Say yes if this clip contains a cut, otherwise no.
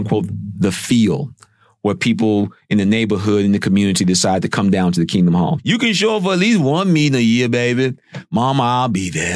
yes